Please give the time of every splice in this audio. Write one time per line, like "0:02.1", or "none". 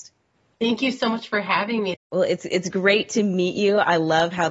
0:01.9